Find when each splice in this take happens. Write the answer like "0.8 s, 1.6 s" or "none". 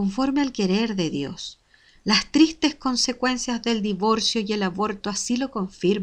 none